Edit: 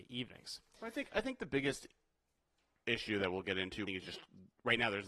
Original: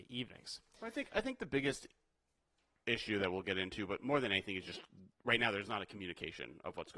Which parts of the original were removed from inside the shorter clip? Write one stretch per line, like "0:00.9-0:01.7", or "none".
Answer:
0:03.9-0:04.5